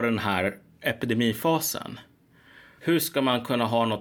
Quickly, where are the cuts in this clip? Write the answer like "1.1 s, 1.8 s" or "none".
2.8 s

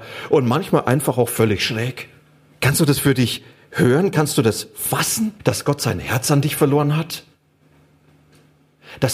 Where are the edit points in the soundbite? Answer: 2.5 s, 5.4 s

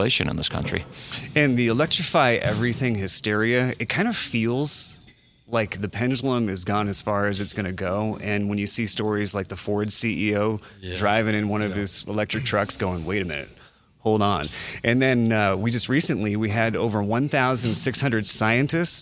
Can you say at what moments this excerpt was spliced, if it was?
none

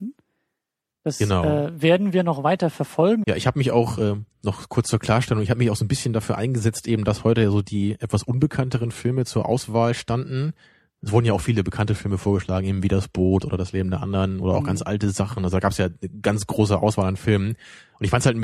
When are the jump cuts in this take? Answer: 3.2 s

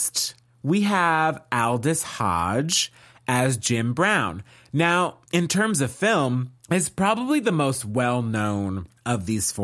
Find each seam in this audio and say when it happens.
5.3 s

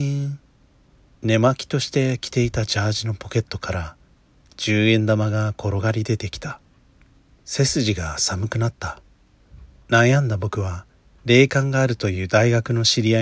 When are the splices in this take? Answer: 9.8 s

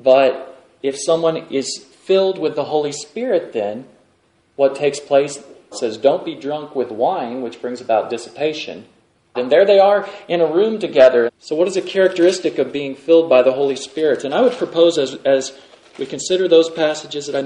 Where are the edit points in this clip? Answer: 5.7 s, 9.3 s, 11.3 s

